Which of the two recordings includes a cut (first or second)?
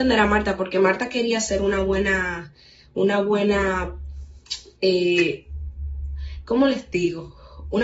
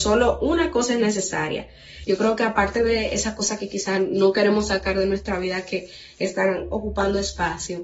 second